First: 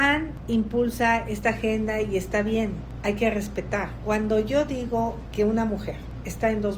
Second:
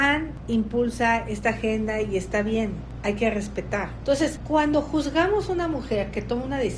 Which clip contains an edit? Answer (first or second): second